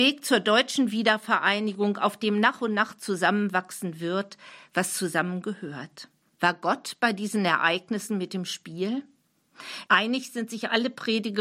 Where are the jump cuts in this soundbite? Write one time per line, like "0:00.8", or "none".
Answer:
0:06.3
0:09.9